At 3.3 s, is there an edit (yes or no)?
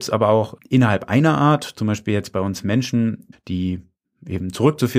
yes